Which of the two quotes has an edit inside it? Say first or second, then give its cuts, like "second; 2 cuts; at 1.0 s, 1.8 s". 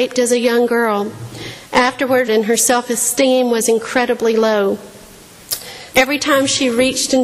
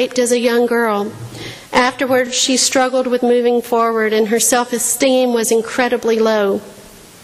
first; 2 cuts; at 2.3 s, 5.9 s